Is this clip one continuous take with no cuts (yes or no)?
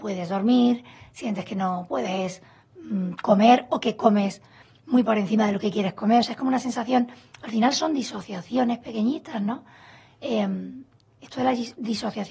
yes